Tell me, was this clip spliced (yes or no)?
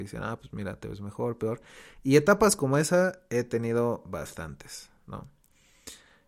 no